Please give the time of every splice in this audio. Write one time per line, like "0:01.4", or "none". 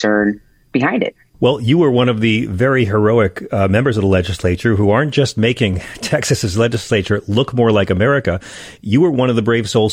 none